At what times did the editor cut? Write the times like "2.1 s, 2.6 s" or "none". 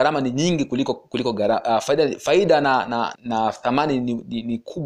3.2 s

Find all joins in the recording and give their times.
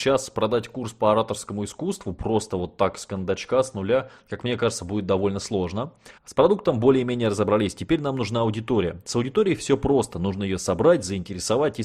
6.2 s

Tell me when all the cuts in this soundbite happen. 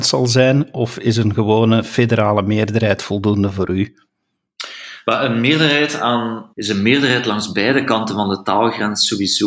6.5 s

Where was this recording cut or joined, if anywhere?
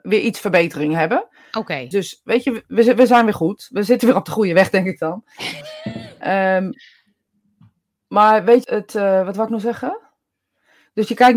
1.9 s, 8.6 s

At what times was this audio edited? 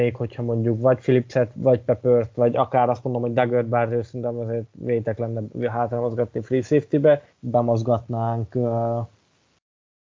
1.5 s, 7.3 s

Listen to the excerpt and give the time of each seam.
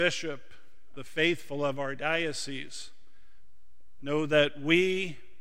0.9 s, 4.0 s

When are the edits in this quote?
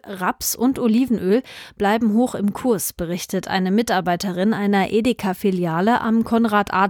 none

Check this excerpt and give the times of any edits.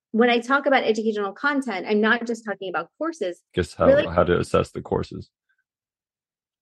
3.5 s

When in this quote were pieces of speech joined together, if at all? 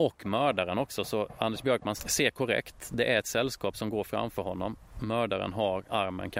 2.0 s

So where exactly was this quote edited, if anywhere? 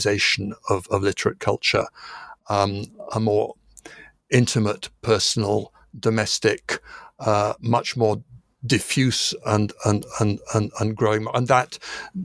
none

